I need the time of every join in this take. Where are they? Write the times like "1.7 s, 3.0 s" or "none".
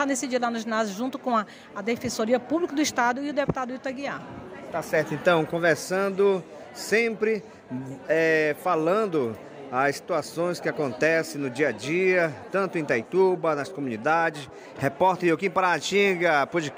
14.8 s